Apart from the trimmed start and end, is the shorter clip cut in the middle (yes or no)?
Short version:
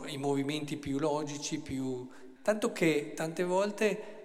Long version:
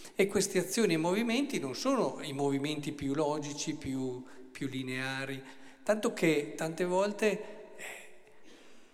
yes